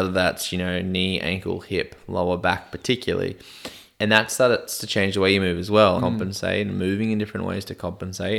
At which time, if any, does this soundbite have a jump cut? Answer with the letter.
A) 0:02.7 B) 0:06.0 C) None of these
B